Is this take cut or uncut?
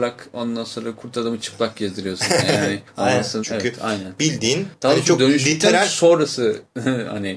cut